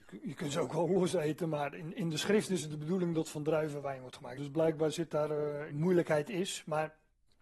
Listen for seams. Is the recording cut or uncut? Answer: cut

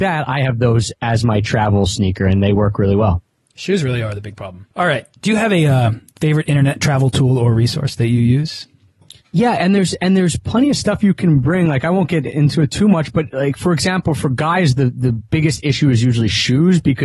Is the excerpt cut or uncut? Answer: cut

